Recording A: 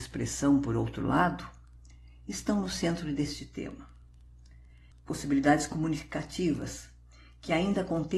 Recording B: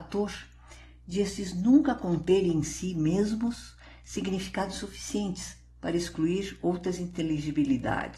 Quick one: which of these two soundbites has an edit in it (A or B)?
A